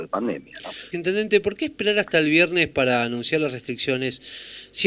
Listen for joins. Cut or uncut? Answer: cut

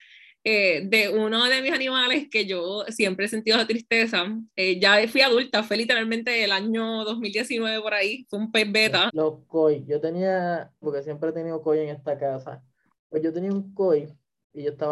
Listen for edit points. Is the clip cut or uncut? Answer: cut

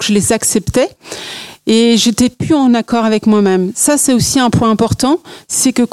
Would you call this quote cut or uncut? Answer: uncut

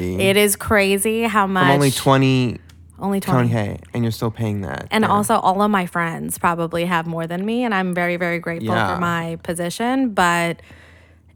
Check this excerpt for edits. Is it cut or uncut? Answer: uncut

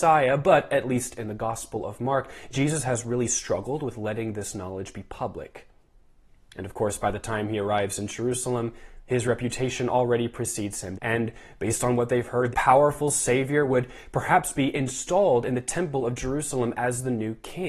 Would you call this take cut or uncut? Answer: cut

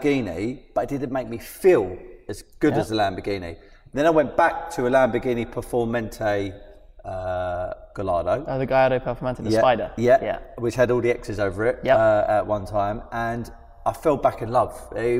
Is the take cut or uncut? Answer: uncut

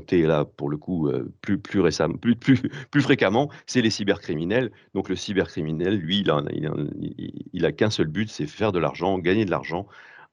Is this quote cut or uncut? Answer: uncut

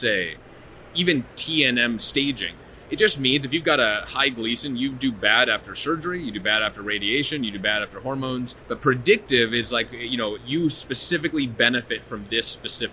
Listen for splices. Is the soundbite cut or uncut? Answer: cut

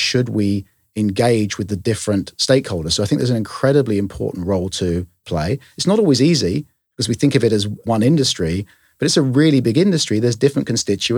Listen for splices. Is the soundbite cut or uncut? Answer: uncut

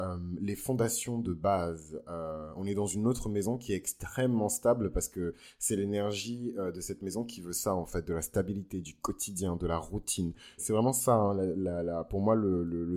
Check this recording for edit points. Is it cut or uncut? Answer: cut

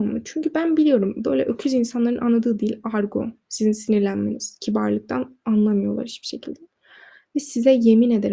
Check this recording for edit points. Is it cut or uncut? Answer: uncut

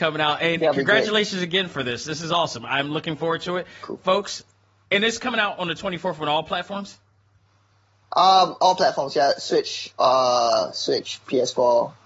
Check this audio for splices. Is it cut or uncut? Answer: uncut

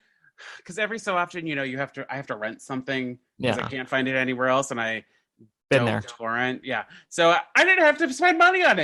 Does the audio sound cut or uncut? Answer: uncut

